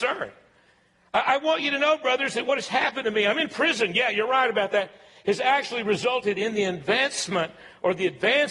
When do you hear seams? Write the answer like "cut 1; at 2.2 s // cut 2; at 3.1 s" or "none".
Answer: none